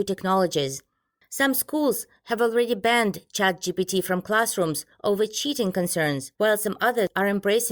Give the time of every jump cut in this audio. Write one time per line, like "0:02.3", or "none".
0:01.2
0:06.3